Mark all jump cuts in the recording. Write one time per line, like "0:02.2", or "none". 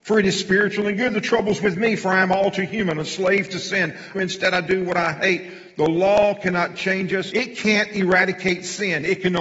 0:04.1
0:07.3